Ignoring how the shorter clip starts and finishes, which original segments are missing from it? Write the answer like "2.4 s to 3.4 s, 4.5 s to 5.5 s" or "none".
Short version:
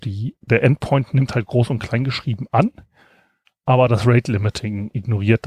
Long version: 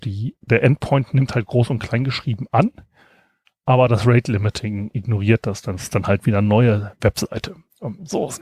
none